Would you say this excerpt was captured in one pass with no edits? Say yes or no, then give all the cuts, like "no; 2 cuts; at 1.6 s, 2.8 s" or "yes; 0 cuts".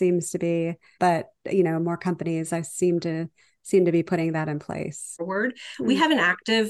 no; 2 cuts; at 1.0 s, 5.2 s